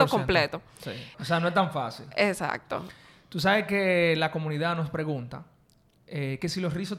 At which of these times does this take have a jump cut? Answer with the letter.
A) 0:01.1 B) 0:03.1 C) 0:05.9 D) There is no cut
A